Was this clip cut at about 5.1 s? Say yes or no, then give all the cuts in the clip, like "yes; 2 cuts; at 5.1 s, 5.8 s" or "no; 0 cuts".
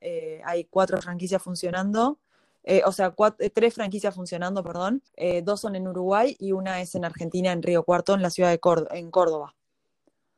yes; 1 cut; at 5.1 s